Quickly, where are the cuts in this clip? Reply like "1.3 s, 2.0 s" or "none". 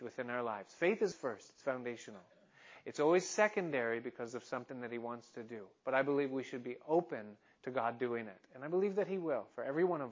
1.1 s